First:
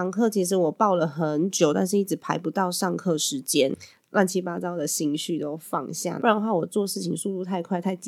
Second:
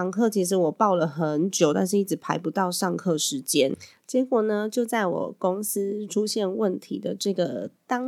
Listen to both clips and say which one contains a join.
first; 2 cuts; at 4.0 s, 6.2 s

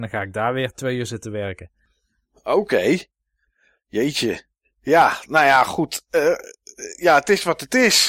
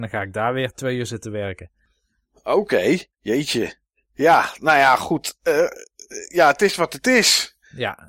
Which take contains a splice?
second; 1 cut; at 3.1 s

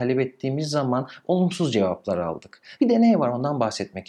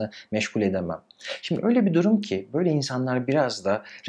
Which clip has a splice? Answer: first; 1 cut; at 2.8 s

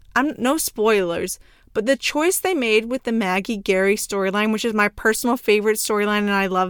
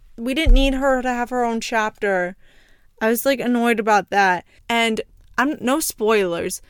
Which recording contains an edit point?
second; 1 cut; at 4.6 s

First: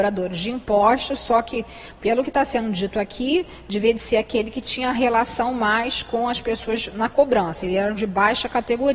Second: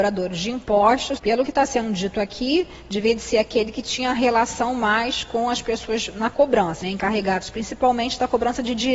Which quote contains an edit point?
second; 2 cuts; at 1.2 s, 6.8 s

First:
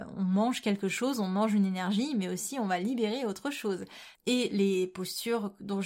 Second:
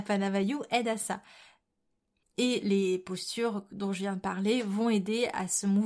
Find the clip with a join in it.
first; 1 cut; at 4.1 s

